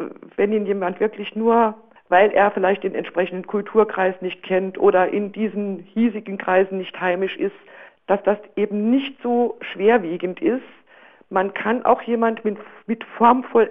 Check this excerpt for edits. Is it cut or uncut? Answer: uncut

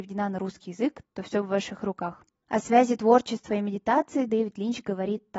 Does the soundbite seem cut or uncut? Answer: cut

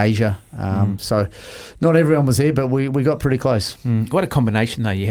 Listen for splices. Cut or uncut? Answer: uncut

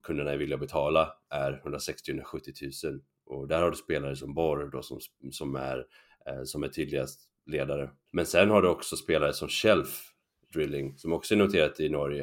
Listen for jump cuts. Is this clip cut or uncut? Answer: cut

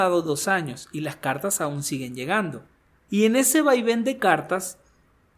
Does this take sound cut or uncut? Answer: uncut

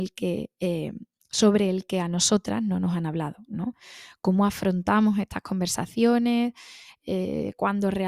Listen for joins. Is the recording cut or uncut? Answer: uncut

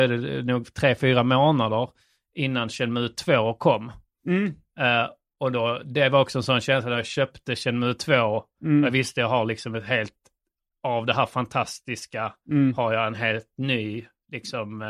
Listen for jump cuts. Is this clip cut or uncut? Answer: uncut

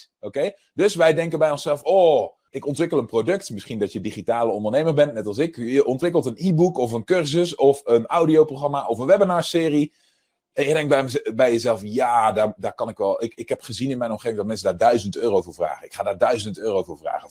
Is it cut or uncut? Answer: uncut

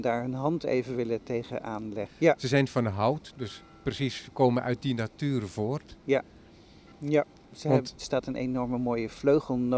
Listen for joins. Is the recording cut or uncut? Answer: cut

